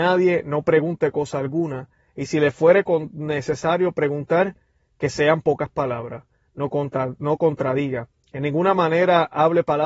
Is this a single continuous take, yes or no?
yes